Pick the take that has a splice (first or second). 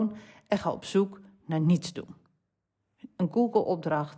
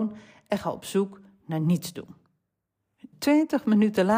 second